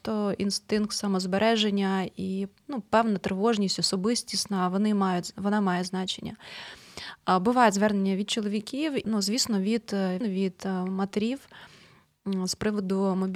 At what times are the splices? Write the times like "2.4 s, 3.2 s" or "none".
9.0 s, 10.2 s